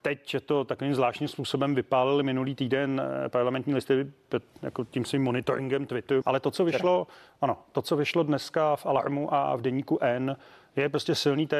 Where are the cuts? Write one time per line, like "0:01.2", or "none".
0:06.2